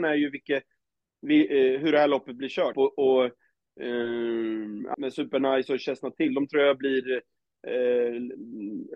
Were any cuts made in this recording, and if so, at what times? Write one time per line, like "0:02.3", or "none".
0:02.7
0:04.9